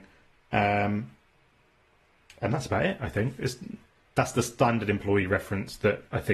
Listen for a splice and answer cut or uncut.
uncut